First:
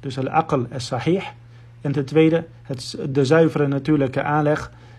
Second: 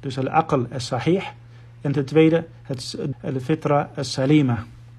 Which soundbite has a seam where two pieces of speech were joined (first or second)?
second